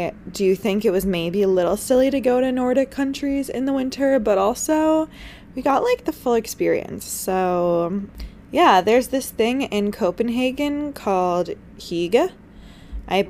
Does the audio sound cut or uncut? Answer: uncut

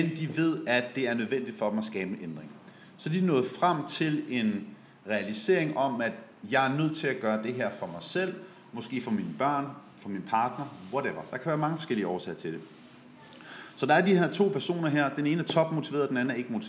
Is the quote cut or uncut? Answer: uncut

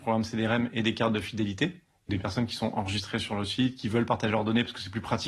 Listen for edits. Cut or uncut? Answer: cut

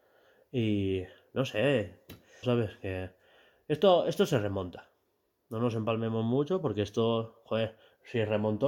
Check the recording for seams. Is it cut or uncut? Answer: cut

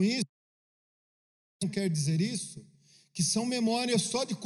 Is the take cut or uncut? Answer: uncut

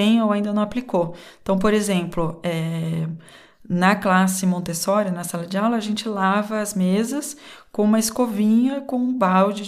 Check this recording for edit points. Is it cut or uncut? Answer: uncut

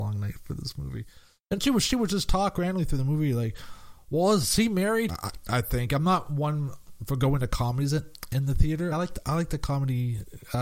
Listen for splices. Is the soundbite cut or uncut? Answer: cut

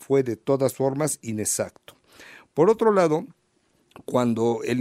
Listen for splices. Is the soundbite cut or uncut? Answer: uncut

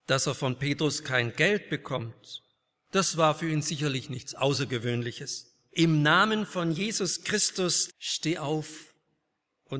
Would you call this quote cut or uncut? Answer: cut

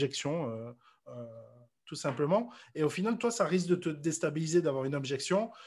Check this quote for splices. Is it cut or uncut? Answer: uncut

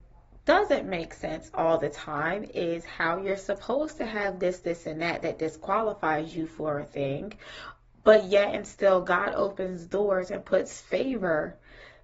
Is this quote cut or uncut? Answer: uncut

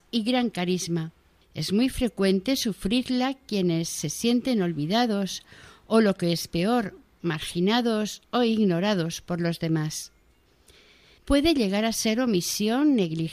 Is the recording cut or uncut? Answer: cut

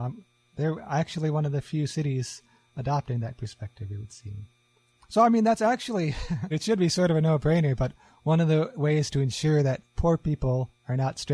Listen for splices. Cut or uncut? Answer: cut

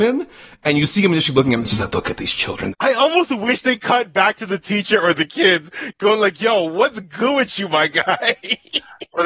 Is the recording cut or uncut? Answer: cut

